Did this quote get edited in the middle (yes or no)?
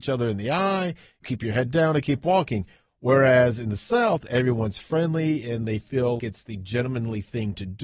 yes